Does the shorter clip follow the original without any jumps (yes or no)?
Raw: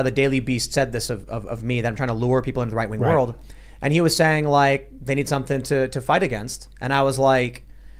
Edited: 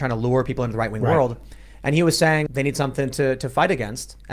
no